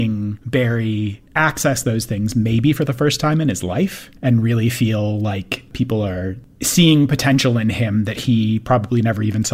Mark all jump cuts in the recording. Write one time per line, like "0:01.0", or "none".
0:04.2